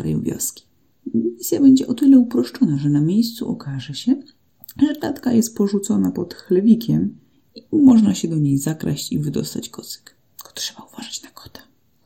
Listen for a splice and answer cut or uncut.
uncut